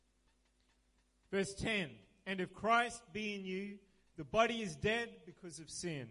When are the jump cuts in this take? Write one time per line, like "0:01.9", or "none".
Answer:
none